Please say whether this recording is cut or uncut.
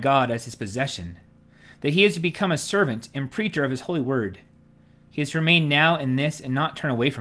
uncut